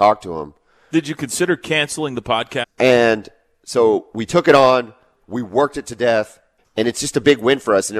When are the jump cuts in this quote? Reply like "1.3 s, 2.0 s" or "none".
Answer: 2.6 s, 6.6 s